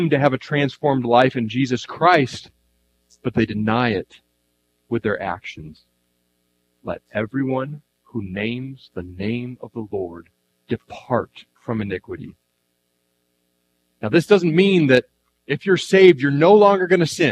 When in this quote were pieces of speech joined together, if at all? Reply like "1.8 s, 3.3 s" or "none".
11.5 s